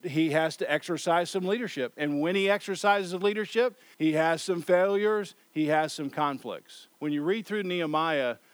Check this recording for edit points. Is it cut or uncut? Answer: cut